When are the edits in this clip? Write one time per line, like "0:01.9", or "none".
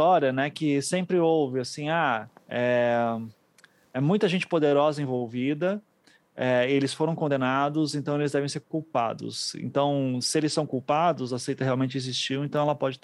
none